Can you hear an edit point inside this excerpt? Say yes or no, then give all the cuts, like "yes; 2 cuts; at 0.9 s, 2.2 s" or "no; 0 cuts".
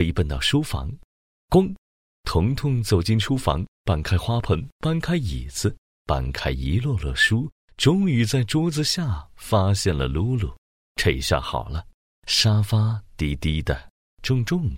yes; 1 cut; at 10.8 s